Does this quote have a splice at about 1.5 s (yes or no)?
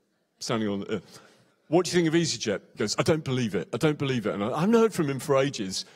yes